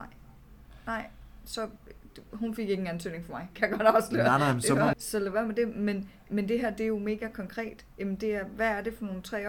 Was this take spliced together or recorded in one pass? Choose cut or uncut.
cut